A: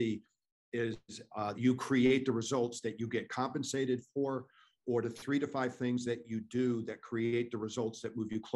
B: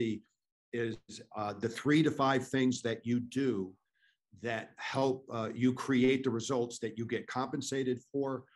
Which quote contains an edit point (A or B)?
A